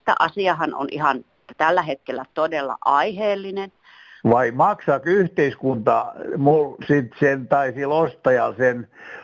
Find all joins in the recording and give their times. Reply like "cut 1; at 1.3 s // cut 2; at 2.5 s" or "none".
cut 1; at 2.3 s // cut 2; at 4.2 s